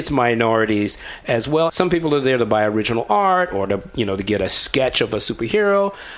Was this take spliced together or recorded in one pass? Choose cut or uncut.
cut